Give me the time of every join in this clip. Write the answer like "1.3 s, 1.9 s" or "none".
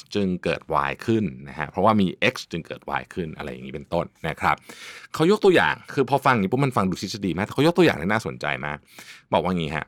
none